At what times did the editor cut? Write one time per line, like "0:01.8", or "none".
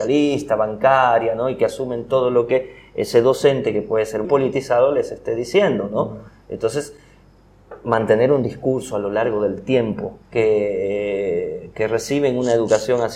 0:04.2
0:10.2